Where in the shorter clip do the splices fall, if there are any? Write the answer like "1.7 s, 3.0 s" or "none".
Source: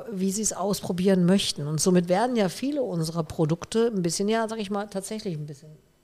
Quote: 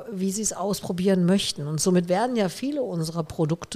none

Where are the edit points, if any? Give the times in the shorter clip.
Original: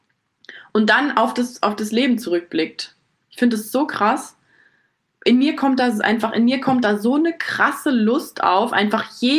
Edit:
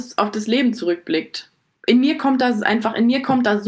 1.8 s

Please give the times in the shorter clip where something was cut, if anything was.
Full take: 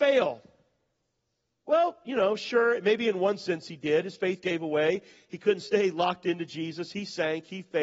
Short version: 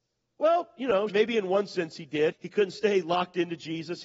1.1 s, 2.3 s

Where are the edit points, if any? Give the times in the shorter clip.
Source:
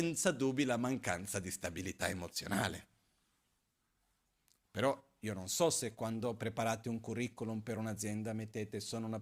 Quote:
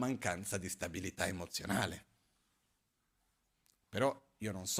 none

